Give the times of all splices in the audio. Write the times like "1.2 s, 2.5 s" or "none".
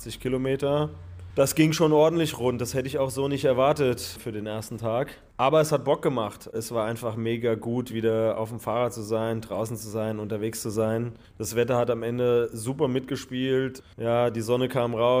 none